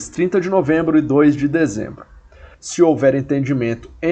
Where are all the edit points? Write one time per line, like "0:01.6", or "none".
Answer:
0:02.5

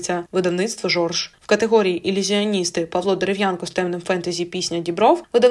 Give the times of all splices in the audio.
0:01.4

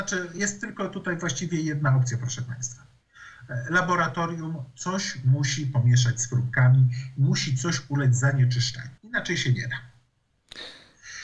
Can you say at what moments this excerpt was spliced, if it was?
0:09.0

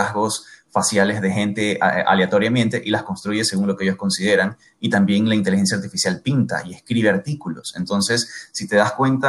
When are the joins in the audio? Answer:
none

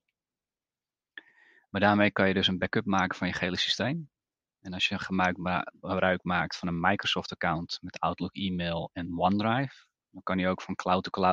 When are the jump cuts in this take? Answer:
none

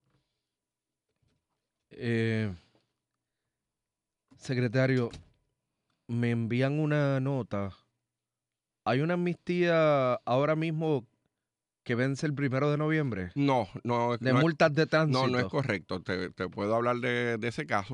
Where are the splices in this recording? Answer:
none

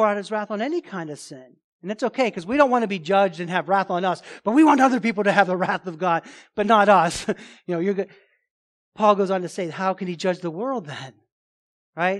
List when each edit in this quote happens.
none

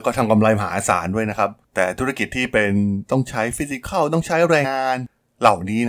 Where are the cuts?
0:04.6

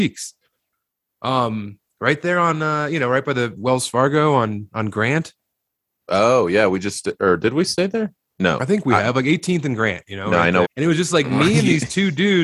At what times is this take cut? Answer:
0:10.6

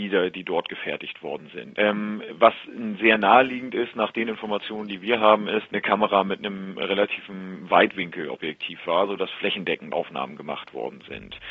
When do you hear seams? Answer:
0:01.7
0:05.7
0:09.9

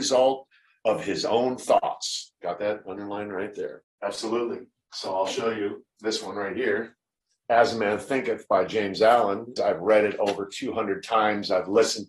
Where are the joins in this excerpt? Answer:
0:03.8
0:09.6

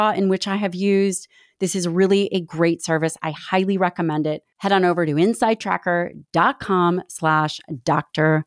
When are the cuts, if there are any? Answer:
none

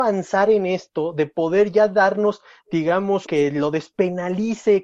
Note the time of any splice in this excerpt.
0:03.3

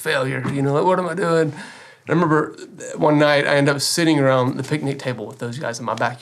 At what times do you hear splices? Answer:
none

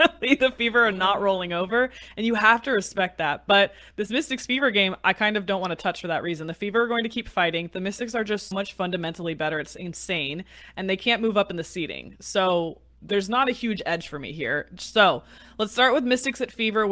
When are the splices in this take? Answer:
0:08.5
0:14.8

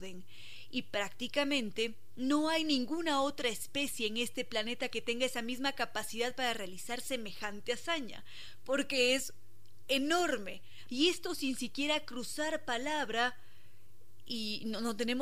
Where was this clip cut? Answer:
0:10.9

